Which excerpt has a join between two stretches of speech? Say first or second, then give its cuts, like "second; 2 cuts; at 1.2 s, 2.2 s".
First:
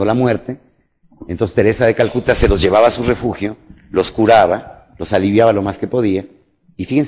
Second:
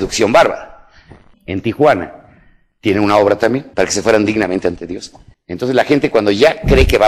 second; 3 cuts; at 1.3 s, 3.7 s, 5.3 s